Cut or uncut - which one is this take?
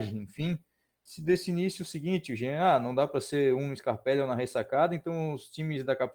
uncut